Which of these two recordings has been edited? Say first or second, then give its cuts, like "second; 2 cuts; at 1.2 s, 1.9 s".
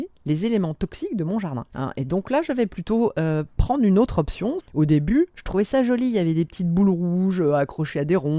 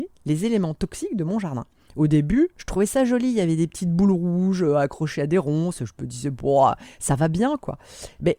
first; 2 cuts; at 1.7 s, 4.6 s